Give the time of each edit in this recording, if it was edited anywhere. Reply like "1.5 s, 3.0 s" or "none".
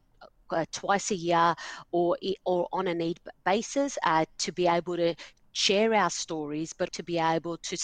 6.9 s